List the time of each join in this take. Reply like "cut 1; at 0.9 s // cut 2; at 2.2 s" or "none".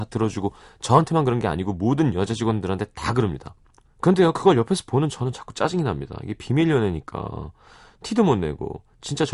cut 1; at 3.8 s